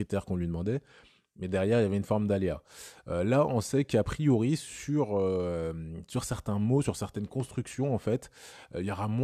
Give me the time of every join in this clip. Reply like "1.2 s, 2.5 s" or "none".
none